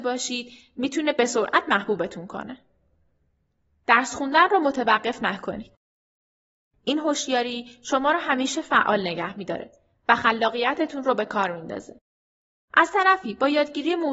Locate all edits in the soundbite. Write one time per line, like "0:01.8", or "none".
0:06.7